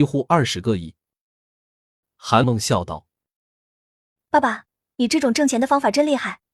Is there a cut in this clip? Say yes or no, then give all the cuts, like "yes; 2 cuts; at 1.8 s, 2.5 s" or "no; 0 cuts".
yes; 1 cut; at 2.4 s